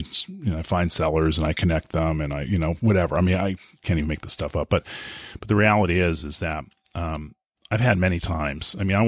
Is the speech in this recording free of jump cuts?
yes; 0 cuts

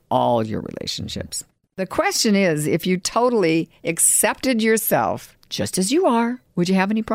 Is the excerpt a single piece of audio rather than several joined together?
yes; 0 cuts

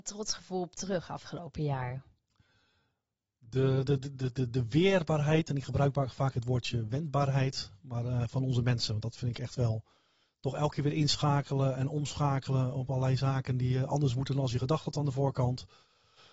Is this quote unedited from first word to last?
yes; 0 cuts

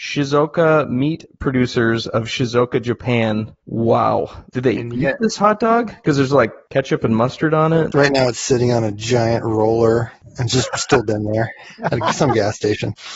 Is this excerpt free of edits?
yes; 0 cuts

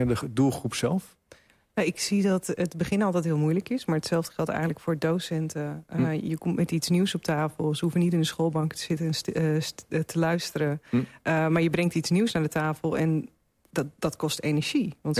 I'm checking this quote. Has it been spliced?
no; 0 cuts

